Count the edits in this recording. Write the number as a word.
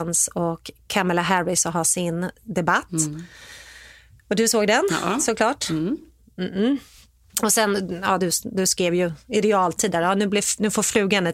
zero